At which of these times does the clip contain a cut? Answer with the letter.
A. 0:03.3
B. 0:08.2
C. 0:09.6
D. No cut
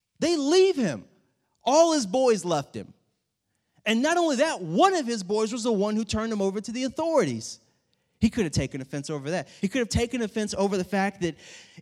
D